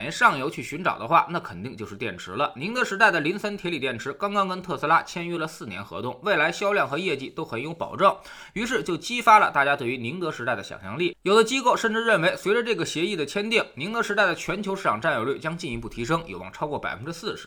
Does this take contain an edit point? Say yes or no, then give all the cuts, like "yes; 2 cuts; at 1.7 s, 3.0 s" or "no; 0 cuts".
no; 0 cuts